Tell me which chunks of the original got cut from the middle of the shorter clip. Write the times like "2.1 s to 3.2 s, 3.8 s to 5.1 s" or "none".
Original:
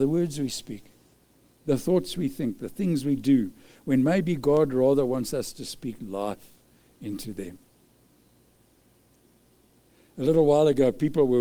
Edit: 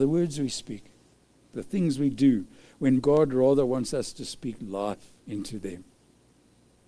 1.5 s to 2.6 s, 4.0 s to 4.4 s, 6.6 s to 6.9 s